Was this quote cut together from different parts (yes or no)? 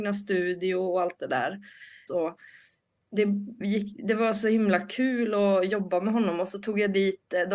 yes